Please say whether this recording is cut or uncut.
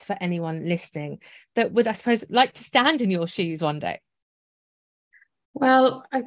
uncut